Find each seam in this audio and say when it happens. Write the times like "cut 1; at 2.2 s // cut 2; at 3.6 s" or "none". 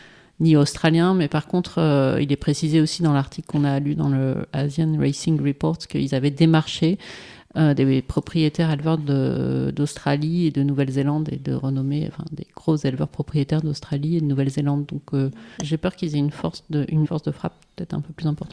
cut 1; at 15.6 s // cut 2; at 17.0 s